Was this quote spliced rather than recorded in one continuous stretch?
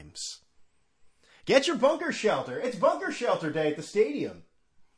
no; 0 cuts

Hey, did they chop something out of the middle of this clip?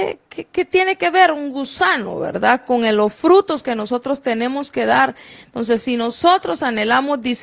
no; 0 cuts

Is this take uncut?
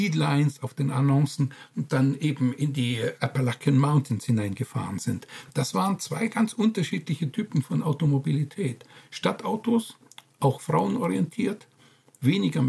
yes; 0 cuts

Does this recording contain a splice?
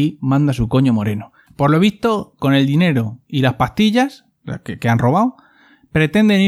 yes; 1 cut; at 1.5 s

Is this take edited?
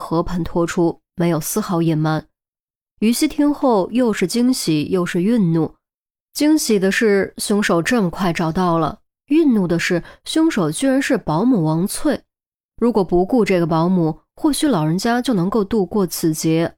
no; 0 cuts

